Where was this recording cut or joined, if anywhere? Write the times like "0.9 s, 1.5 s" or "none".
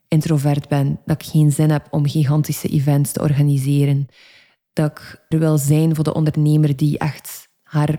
5.3 s